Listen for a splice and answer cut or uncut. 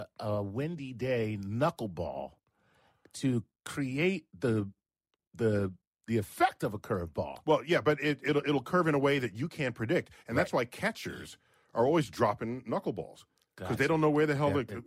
uncut